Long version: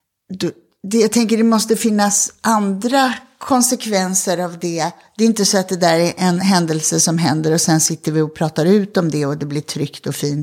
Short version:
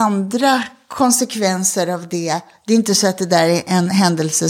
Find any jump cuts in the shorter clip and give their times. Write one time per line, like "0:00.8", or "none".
none